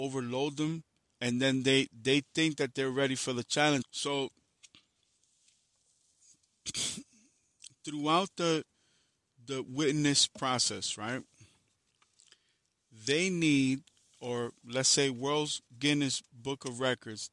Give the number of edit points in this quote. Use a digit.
1